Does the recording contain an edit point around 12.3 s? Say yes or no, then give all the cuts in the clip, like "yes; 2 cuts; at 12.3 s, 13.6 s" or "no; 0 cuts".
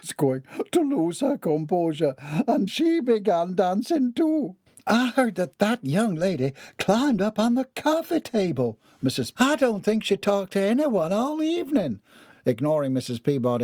yes; 3 cuts; at 2.7 s, 9.4 s, 12.3 s